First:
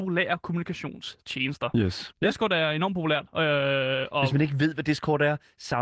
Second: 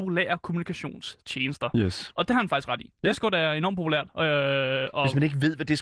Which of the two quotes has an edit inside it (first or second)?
first